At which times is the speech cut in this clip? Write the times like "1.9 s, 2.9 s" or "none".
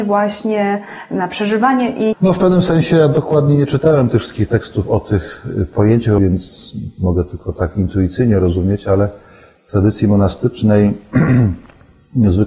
2.1 s, 6.2 s